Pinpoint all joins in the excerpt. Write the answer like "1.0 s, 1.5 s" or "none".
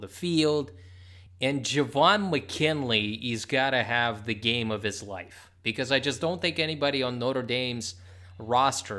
none